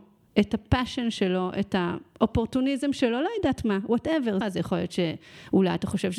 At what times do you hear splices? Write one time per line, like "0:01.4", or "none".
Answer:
0:04.4